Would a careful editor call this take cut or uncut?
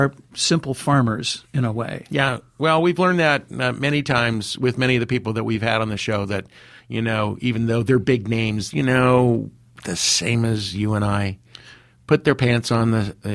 cut